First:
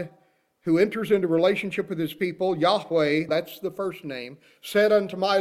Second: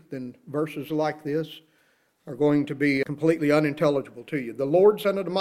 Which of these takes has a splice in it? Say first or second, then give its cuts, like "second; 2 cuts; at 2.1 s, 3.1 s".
first; 1 cut; at 3.3 s